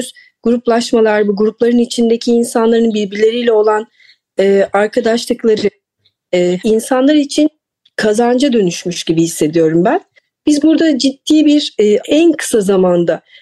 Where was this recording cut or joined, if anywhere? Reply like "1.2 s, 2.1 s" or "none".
6.6 s, 12.0 s